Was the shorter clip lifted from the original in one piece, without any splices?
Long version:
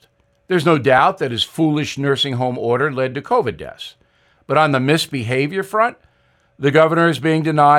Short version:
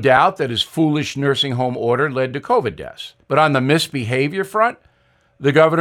no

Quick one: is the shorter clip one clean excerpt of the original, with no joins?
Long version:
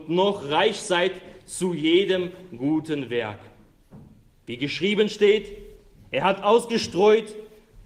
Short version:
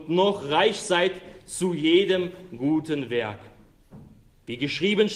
yes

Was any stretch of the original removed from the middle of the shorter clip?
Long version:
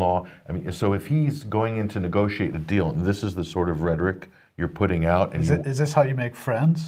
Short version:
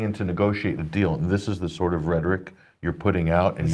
no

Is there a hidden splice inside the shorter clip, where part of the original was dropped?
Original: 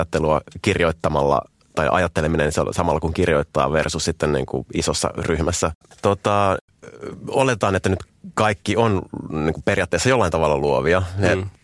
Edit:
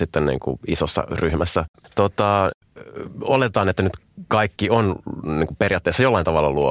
no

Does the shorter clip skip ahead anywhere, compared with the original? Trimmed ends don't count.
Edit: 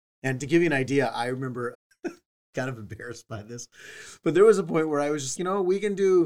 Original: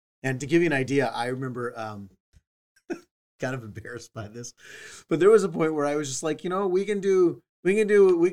yes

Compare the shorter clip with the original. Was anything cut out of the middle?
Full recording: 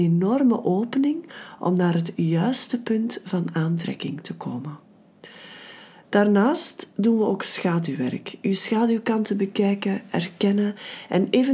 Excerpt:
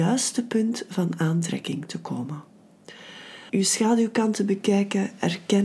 yes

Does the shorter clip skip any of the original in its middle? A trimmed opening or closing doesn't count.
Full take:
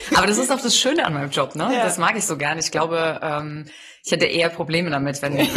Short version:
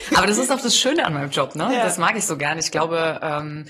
no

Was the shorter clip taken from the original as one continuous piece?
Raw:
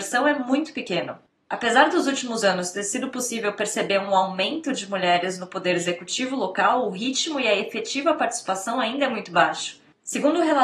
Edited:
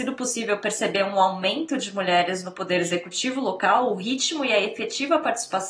yes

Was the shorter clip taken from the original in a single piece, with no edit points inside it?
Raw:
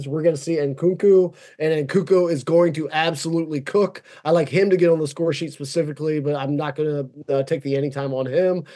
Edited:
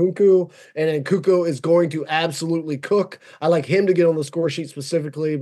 yes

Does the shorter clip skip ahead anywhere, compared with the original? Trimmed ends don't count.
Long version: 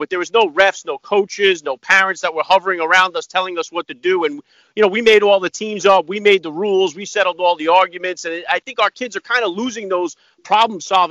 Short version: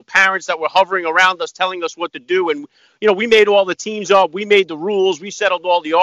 no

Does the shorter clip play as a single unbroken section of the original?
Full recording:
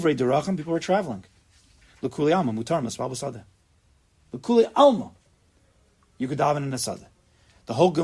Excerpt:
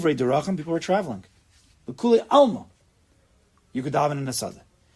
no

